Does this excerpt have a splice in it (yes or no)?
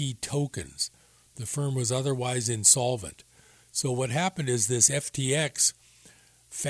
no